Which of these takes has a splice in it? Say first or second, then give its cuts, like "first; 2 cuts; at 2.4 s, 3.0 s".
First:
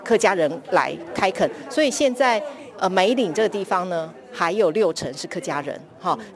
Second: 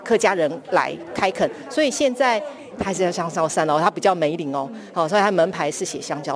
second; 1 cut; at 2.7 s